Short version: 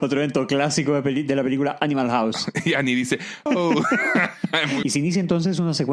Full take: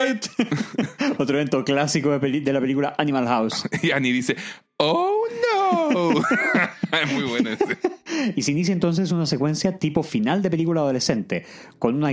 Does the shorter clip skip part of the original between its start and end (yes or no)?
yes